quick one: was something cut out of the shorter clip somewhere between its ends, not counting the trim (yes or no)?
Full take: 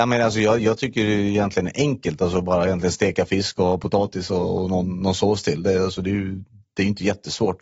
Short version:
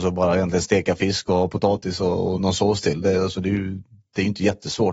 yes